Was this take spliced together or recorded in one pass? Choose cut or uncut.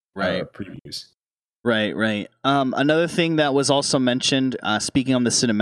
uncut